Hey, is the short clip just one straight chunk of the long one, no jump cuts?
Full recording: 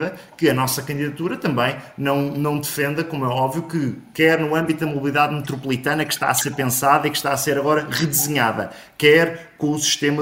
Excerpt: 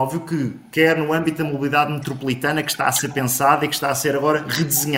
yes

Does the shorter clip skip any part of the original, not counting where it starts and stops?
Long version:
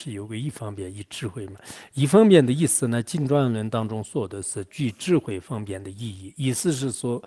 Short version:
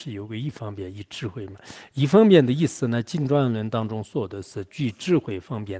no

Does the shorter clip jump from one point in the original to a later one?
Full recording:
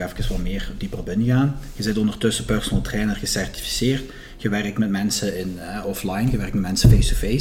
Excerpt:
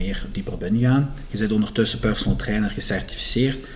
no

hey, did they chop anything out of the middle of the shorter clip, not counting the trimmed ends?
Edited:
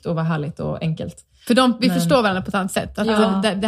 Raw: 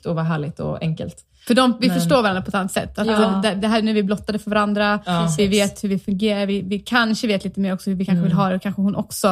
no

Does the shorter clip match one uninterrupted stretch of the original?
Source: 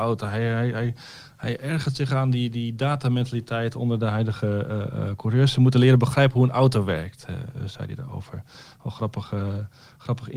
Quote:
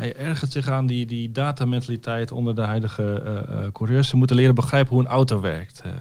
yes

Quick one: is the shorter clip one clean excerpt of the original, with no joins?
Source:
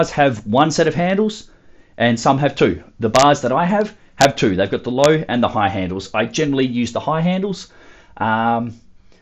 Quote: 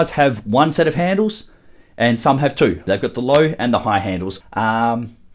no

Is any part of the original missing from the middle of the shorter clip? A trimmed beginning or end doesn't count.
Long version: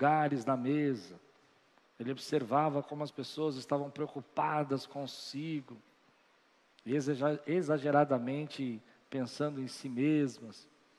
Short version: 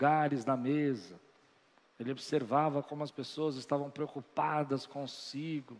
no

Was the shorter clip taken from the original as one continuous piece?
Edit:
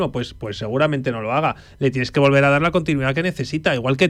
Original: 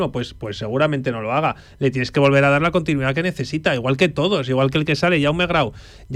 yes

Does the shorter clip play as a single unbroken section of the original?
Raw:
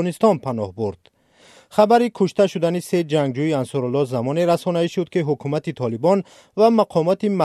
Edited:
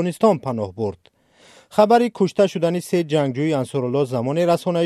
yes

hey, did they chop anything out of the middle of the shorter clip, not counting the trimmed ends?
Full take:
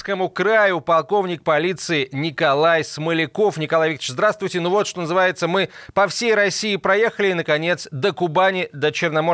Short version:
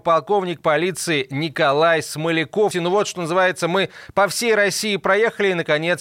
yes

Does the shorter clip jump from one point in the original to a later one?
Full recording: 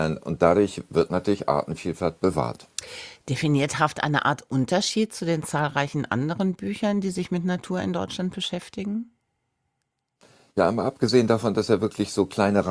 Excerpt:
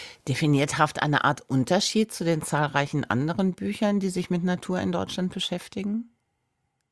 no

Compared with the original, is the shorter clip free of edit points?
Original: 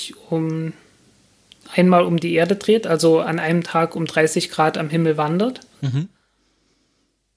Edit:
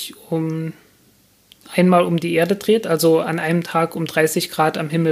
yes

